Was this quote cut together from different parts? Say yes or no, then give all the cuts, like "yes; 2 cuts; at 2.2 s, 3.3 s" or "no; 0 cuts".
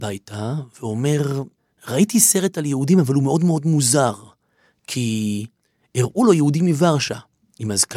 no; 0 cuts